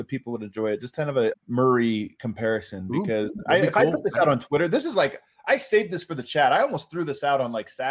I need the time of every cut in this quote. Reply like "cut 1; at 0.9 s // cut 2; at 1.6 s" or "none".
cut 1; at 1.3 s